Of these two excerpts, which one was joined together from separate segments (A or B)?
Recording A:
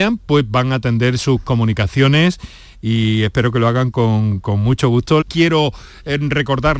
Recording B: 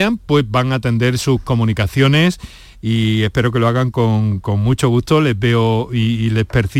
A